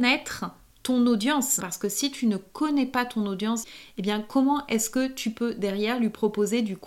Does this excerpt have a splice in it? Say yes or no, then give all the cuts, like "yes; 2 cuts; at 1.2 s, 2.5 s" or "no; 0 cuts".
yes; 2 cuts; at 1.6 s, 3.6 s